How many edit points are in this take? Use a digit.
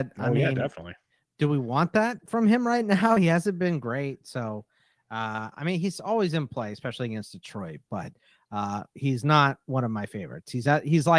0